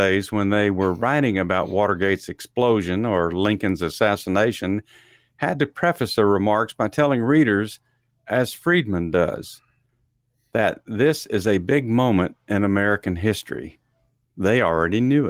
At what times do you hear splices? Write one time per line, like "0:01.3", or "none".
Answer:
none